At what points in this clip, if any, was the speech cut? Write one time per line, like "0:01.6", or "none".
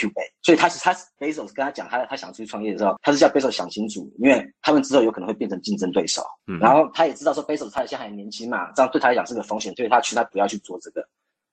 0:06.4
0:08.7